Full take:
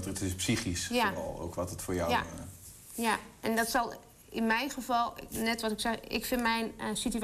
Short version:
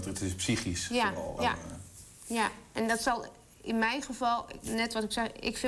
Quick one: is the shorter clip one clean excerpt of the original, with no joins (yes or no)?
no